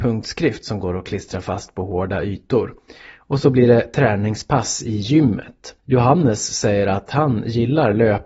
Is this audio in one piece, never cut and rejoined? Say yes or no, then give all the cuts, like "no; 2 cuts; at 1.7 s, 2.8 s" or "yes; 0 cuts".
no; 1 cut; at 5.8 s